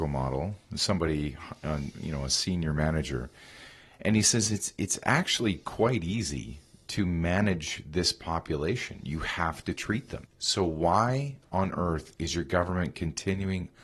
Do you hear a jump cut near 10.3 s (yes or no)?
yes